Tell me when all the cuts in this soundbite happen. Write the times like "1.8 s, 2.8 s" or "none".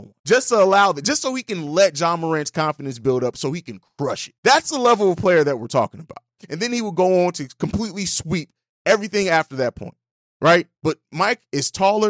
6.4 s, 10.8 s

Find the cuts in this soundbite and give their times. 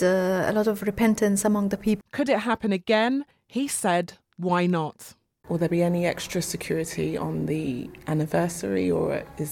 2.0 s

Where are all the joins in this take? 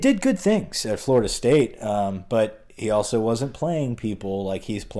none

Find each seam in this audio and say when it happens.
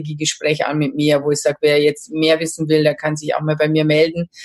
none

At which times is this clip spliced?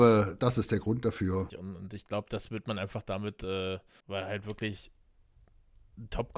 1.5 s, 4.0 s

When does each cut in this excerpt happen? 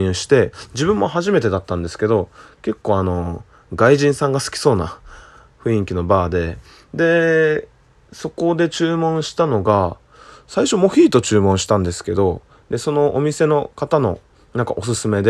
none

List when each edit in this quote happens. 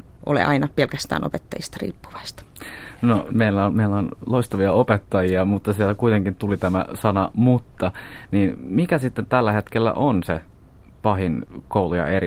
3.3 s

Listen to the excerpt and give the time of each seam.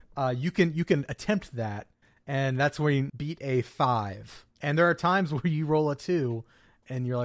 3.1 s, 4.5 s

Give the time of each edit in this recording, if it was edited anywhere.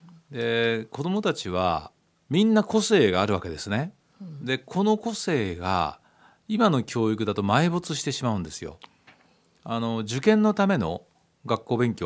none

